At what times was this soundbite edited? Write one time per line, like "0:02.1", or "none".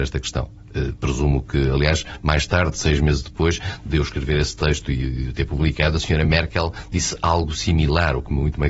none